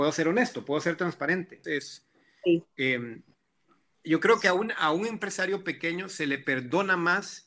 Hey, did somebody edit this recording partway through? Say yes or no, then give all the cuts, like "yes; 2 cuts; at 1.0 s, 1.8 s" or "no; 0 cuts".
yes; 1 cut; at 1.6 s